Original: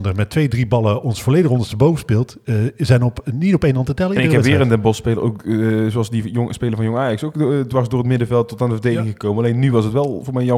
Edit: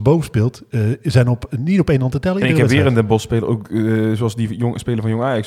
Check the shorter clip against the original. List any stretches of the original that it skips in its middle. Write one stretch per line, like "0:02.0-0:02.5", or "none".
none

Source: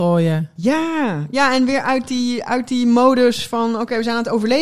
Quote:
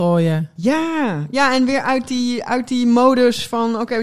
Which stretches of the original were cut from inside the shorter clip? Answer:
none

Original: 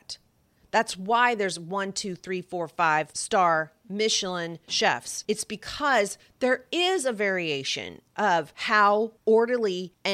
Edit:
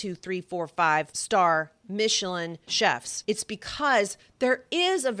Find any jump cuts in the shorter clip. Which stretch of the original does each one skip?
none

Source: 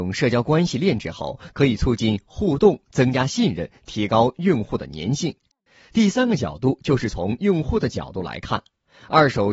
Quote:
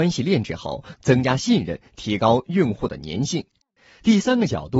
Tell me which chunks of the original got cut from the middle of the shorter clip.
0:01.5-0:02.8

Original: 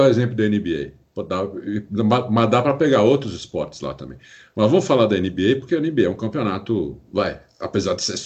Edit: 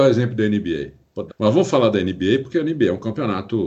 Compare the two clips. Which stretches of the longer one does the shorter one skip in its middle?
0:01.3-0:04.4

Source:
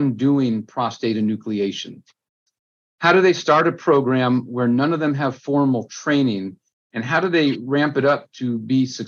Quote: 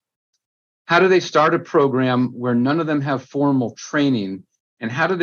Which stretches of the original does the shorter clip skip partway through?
none

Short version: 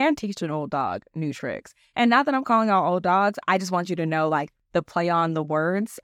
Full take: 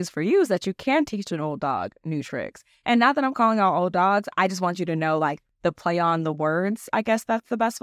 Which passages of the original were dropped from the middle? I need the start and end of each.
none

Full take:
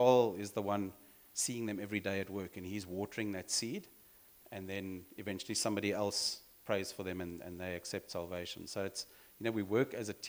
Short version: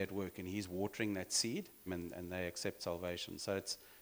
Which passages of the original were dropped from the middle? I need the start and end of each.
0:04.0-0:07.1

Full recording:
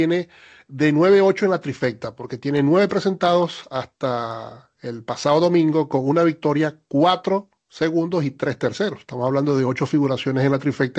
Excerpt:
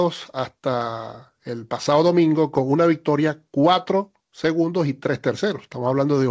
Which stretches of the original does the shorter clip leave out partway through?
none

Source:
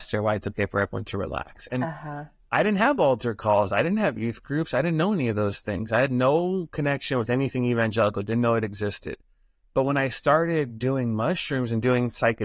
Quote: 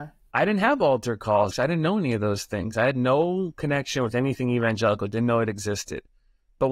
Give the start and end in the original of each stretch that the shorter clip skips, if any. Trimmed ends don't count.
0:03.7-0:04.7

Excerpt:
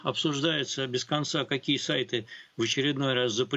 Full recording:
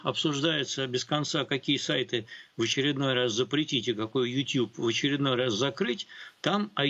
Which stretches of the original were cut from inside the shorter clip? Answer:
none

